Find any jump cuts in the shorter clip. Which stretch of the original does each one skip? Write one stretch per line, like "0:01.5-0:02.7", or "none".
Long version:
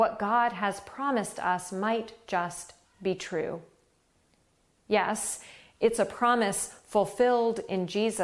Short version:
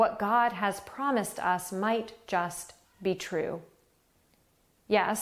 none